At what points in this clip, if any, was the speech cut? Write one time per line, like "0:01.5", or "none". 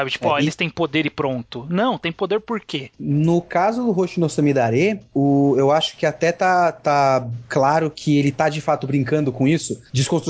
none